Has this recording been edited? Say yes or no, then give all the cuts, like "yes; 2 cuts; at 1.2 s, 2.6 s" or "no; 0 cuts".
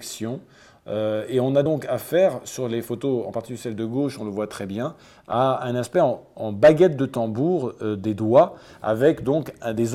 no; 0 cuts